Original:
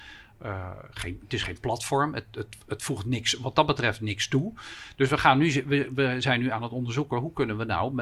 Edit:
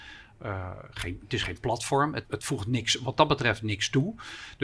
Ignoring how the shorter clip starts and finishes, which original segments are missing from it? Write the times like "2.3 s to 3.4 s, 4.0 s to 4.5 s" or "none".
2.2 s to 2.6 s